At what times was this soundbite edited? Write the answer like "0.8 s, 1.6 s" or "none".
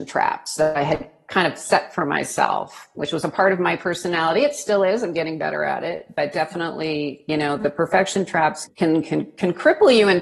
8.7 s